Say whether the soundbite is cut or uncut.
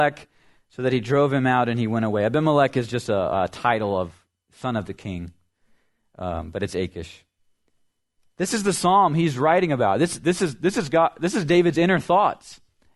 uncut